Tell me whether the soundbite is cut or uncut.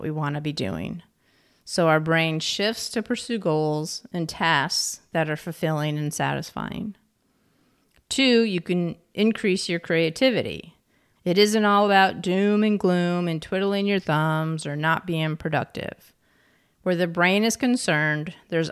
cut